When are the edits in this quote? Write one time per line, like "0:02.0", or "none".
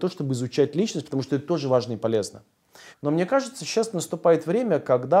0:02.9

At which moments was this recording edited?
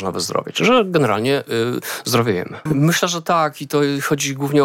0:02.7

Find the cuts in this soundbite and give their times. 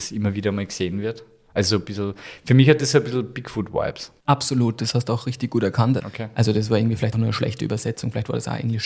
0:04.2
0:06.0
0:07.1

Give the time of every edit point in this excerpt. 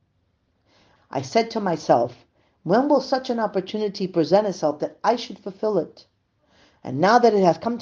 0:01.0

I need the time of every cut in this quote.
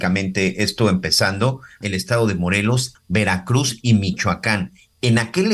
0:01.8
0:03.0

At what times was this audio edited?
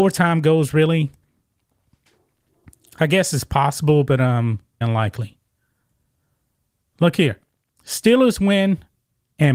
0:04.8

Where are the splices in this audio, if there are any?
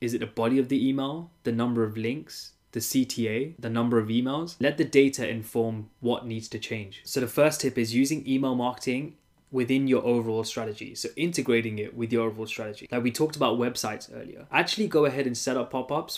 0:07.0

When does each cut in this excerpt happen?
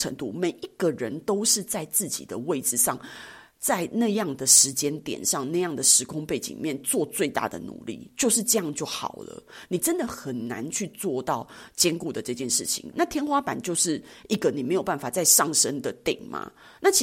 0:12.9

